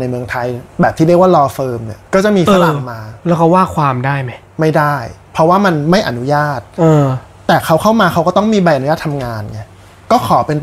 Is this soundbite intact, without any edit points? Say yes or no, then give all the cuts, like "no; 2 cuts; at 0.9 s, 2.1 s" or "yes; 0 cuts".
no; 1 cut; at 2.0 s